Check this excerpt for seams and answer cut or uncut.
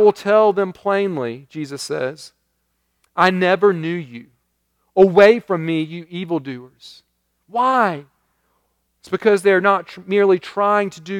cut